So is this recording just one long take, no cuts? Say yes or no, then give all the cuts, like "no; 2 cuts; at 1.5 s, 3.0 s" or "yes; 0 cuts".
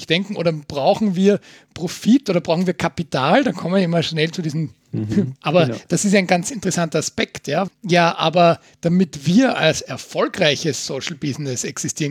no; 2 cuts; at 5.4 s, 7.7 s